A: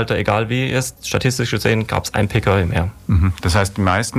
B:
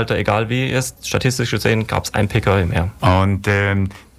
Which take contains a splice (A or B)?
B